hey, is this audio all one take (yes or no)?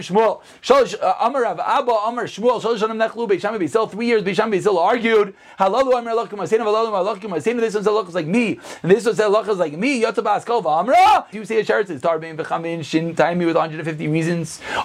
no